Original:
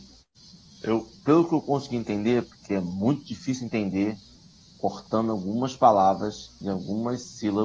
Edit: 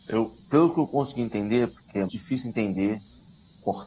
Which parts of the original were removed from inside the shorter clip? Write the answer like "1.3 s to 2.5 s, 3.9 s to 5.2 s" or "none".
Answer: 2.8 s to 3.2 s